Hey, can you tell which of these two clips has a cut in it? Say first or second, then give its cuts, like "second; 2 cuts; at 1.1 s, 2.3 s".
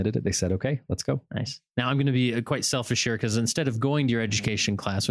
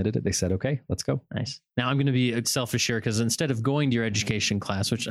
second; 1 cut; at 2.4 s